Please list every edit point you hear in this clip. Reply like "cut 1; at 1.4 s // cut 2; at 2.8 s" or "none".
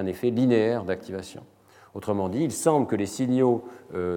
none